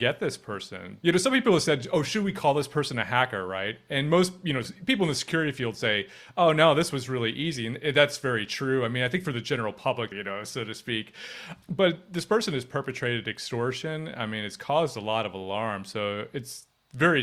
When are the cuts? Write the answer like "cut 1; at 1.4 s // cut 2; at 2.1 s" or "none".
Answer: cut 1; at 10.1 s